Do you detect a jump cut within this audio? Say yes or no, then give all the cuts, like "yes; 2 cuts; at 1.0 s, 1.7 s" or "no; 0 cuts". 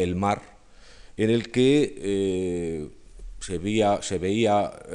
no; 0 cuts